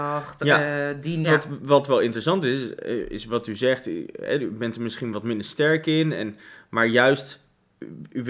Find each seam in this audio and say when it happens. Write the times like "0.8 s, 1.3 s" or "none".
1.2 s